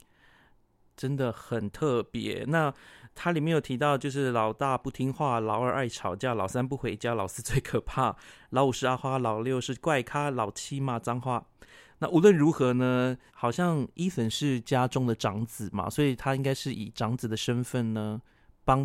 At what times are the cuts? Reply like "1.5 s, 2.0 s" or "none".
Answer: 13.3 s